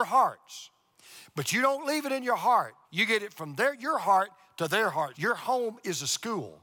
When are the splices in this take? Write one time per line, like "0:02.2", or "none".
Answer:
0:02.8
0:05.1